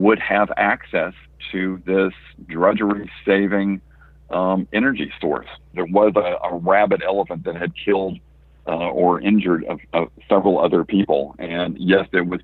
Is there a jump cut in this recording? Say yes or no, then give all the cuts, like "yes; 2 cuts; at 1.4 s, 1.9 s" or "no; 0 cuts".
yes; 1 cut; at 5.7 s